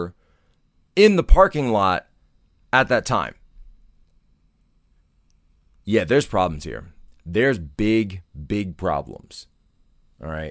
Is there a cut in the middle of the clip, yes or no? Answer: no